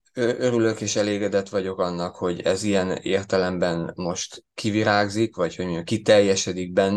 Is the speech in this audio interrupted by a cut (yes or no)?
no